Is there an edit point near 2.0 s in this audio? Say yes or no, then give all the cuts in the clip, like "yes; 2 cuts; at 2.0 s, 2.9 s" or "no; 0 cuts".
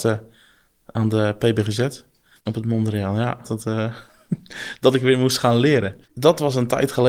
no; 2 cuts; at 3.4 s, 6.1 s